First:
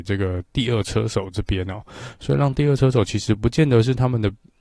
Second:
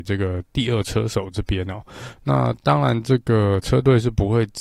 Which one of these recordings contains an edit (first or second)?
second